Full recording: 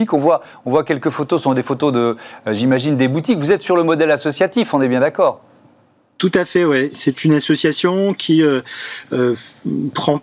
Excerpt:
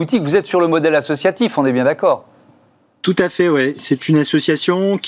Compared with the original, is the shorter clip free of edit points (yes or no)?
yes